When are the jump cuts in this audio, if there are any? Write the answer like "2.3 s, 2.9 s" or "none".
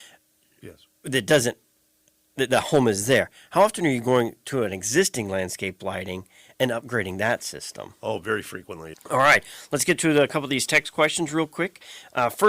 8.9 s